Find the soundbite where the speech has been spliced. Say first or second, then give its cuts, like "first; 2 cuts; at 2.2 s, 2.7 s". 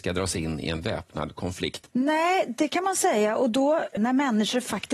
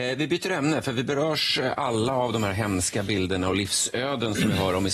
first; 2 cuts; at 1.9 s, 4.0 s